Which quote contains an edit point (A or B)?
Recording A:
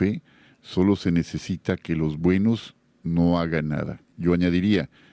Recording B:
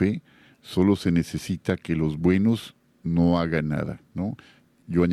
A